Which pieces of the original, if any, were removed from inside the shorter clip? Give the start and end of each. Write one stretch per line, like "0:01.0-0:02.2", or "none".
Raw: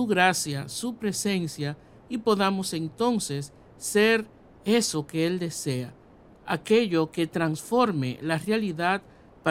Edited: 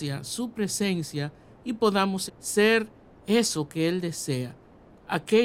0:02.7-0:03.6